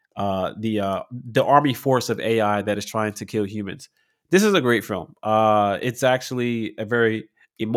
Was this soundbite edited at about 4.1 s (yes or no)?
no